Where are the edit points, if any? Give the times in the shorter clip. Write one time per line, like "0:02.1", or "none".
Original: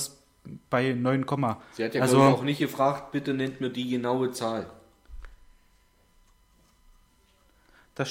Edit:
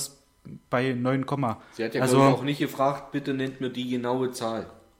none